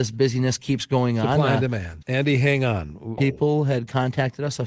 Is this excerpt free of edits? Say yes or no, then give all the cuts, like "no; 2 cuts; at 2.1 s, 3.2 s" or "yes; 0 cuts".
no; 2 cuts; at 2.0 s, 3.2 s